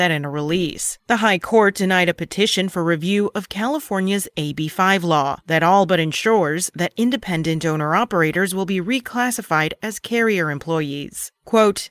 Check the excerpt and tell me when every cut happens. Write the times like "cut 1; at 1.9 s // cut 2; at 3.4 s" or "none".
cut 1; at 1.0 s